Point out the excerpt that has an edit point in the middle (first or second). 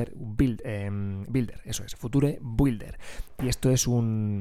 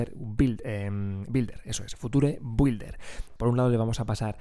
second